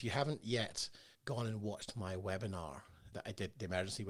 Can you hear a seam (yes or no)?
yes